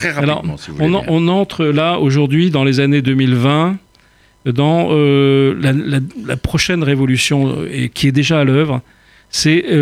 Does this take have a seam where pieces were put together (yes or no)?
no